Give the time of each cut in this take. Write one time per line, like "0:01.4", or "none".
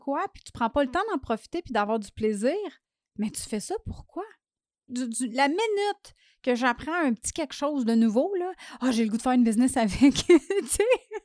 0:04.9

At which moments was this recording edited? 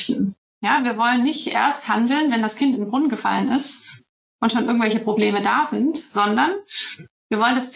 none

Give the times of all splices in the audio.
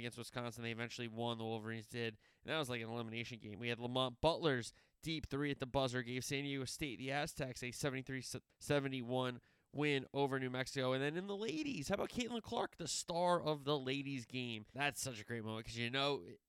0:08.5
0:14.7

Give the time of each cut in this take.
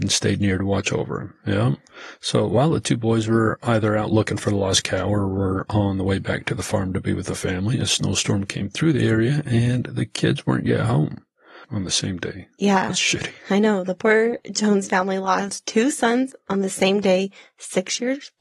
0:01.4
0:11.6

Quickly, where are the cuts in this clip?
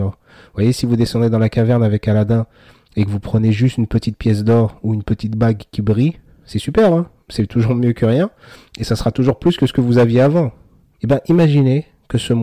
0:11.0

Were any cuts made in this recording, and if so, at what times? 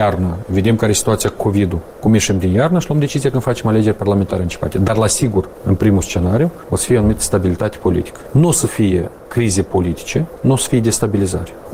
0:08.2

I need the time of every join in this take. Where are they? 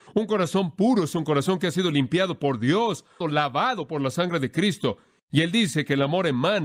0:03.2
0:05.2

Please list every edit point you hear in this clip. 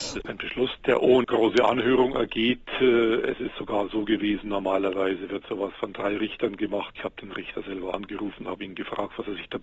0:01.2
0:06.9

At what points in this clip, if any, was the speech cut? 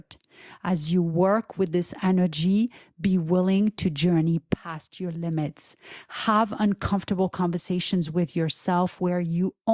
none

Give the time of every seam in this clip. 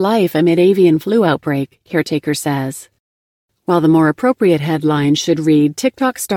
none

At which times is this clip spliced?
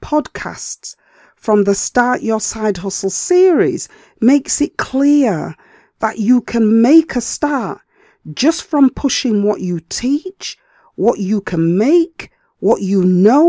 none

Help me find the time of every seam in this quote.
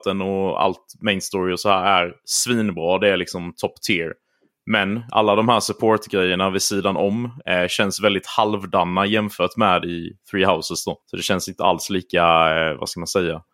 0:11.0

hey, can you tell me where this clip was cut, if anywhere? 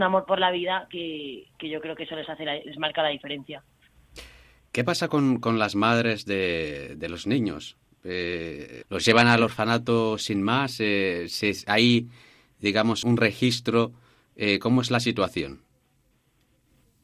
0:08.8
0:13.0

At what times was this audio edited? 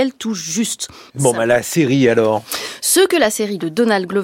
0:01.1

